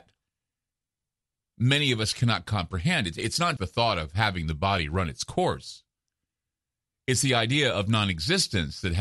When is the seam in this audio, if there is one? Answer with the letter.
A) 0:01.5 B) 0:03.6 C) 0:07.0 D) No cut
B